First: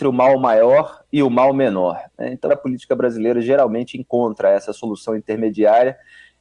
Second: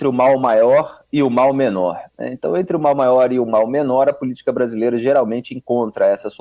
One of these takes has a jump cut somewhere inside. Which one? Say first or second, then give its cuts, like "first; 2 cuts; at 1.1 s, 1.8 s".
first; 1 cut; at 2.5 s